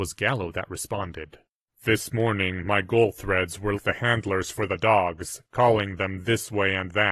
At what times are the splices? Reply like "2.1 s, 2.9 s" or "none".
1.7 s, 3.8 s

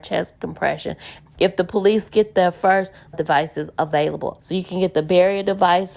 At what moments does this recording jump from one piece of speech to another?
1.3 s, 3.1 s, 4.4 s

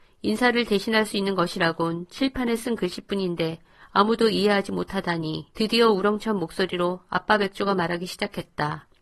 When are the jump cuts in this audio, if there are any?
5.5 s

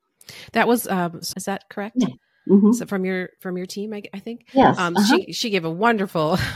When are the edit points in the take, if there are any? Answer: 1.3 s

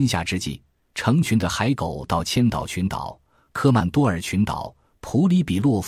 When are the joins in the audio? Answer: none

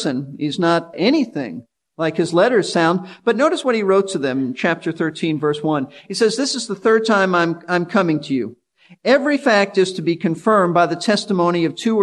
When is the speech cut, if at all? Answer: 0.9 s

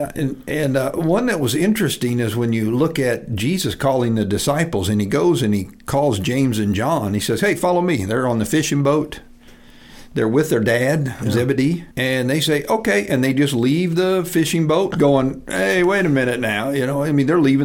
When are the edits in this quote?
11.9 s, 14.9 s

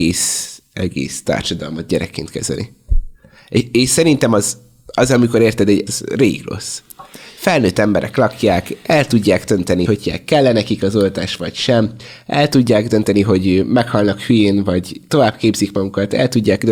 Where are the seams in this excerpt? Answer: 5.9 s, 9.9 s

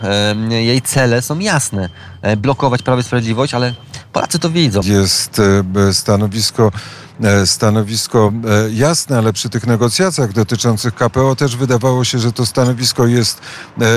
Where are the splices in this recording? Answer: 4.8 s

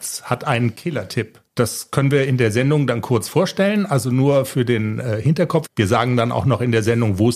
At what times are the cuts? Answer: 1.5 s, 5.7 s

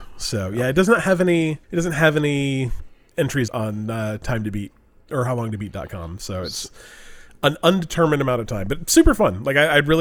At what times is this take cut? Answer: 1.6 s, 3.5 s

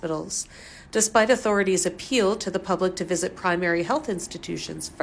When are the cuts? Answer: none

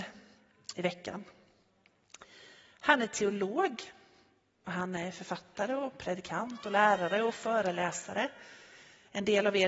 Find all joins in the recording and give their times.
none

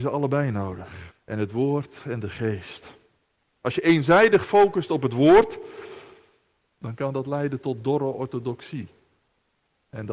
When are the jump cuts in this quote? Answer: 1.1 s, 6.6 s

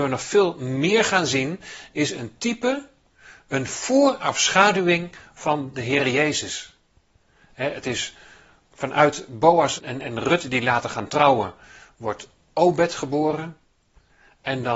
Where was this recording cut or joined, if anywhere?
7.4 s, 9.8 s

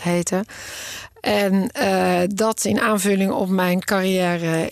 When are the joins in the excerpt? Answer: none

